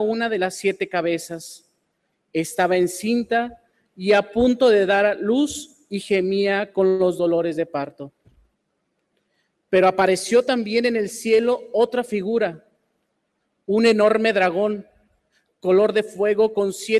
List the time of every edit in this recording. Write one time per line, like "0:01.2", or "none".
0:02.1